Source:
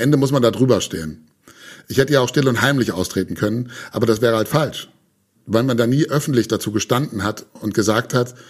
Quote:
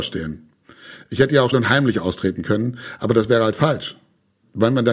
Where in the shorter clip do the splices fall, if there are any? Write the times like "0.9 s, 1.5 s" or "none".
1.5 s